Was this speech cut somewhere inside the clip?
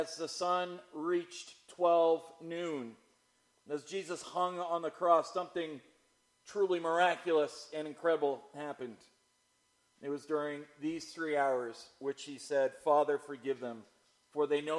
yes; 1 cut; at 9.9 s

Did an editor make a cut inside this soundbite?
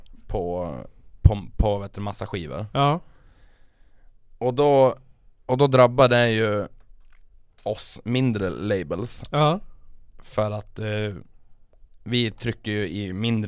no; 0 cuts

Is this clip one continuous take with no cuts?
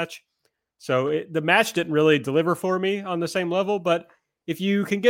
yes; 0 cuts

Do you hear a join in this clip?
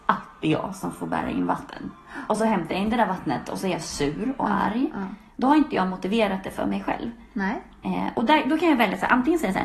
no; 0 cuts

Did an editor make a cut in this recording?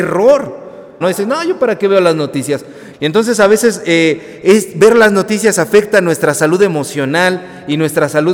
yes; 2 cuts; at 1.0 s, 2.9 s

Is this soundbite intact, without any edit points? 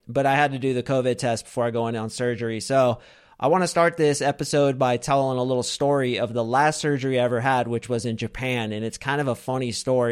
yes; 0 cuts

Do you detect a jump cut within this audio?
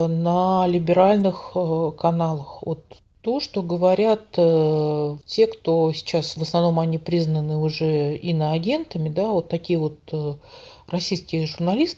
yes; 1 cut; at 6.4 s

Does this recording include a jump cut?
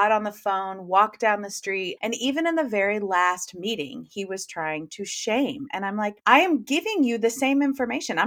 yes; 2 cuts; at 2.0 s, 6.2 s

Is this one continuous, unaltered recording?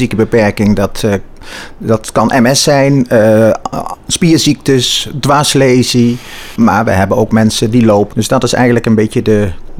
no; 2 cuts; at 6.6 s, 8.1 s

